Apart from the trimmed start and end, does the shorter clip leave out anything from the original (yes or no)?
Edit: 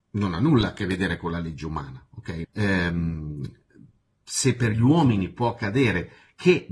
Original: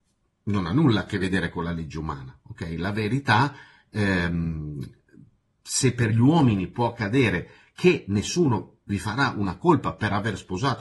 yes